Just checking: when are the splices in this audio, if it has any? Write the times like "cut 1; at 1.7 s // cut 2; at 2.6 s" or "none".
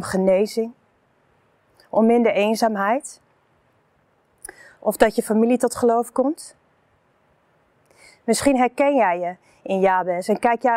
none